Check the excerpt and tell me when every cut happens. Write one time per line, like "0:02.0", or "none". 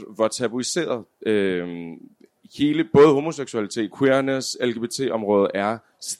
0:03.9